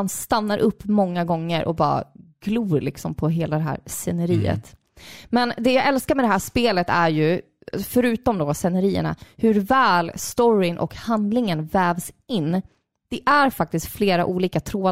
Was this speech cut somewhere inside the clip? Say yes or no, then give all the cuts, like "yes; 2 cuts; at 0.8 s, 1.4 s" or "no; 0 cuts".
no; 0 cuts